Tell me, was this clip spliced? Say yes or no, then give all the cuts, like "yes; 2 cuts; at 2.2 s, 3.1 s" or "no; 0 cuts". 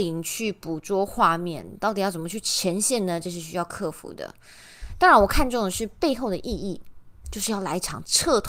no; 0 cuts